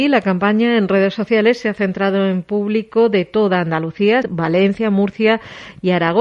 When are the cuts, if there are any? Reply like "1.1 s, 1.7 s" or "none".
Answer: 4.2 s